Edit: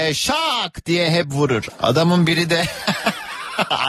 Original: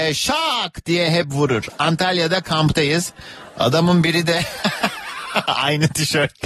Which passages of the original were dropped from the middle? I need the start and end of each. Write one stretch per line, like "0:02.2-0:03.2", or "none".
0:01.8-0:03.5